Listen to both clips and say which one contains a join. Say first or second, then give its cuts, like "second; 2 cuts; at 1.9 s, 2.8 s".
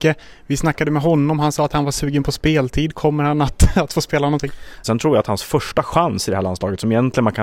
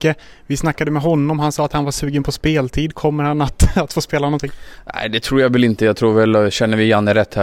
first; 1 cut; at 4.8 s